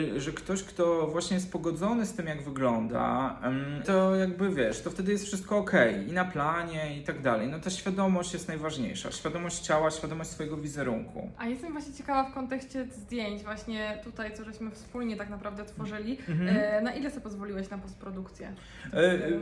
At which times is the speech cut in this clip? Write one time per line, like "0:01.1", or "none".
0:03.8